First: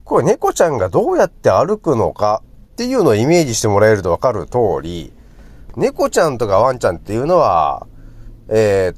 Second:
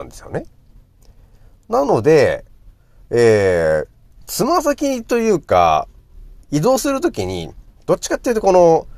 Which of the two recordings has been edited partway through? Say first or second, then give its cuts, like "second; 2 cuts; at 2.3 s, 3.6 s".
second; 1 cut; at 6.4 s